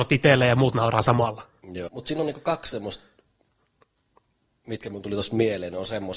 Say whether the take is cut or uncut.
cut